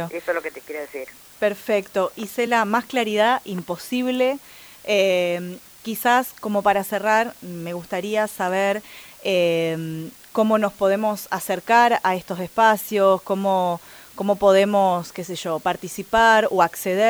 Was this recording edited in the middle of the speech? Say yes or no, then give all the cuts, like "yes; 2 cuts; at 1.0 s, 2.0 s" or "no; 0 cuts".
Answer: no; 0 cuts